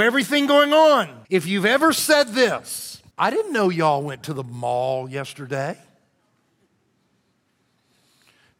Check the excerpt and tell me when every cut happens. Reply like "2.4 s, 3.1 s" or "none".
1.2 s, 3.1 s